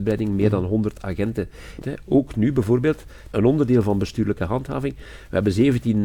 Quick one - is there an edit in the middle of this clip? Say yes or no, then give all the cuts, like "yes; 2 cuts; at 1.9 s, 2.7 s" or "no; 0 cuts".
yes; 2 cuts; at 1.8 s, 3.3 s